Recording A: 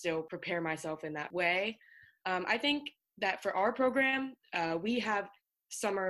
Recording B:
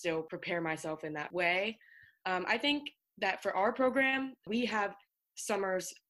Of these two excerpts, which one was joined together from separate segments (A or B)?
B